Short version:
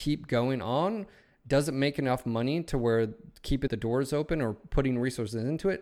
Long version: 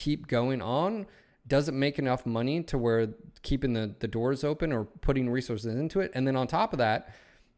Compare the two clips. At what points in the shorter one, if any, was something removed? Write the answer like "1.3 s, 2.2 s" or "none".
3.7 s